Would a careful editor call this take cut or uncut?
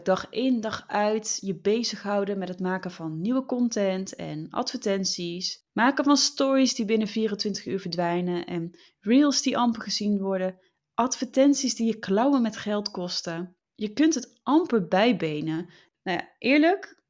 uncut